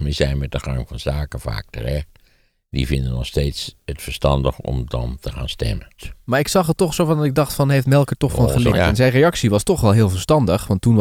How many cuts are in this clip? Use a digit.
2